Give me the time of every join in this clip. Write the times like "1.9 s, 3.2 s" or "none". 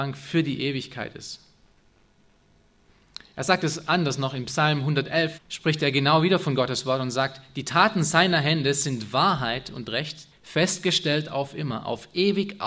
5.4 s, 10.3 s